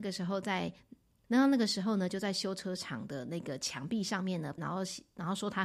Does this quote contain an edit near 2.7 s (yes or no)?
no